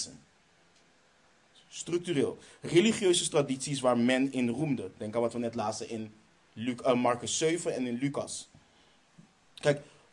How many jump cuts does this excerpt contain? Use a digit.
0